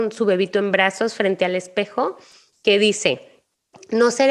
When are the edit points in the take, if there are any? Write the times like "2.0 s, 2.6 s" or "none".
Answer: none